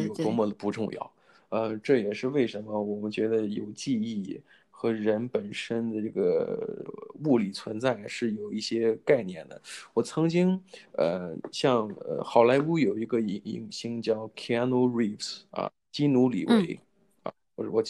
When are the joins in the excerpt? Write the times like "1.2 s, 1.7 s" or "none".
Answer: none